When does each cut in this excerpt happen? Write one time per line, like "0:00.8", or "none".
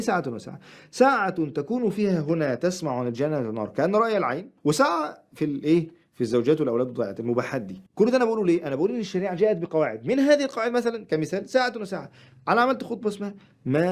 0:04.6
0:07.9